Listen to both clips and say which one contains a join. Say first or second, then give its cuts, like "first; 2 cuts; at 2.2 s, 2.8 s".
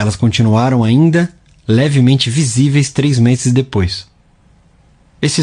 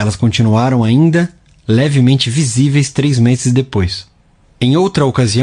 second; 1 cut; at 4.4 s